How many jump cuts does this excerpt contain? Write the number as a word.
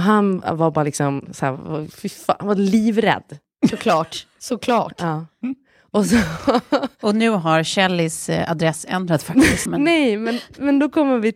one